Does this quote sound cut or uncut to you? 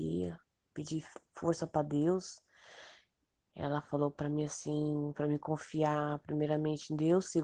uncut